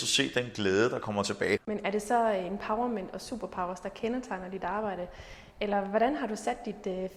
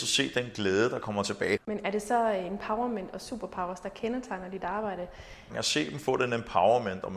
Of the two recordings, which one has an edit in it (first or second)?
second